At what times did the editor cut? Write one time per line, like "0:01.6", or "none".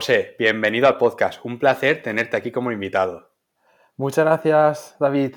none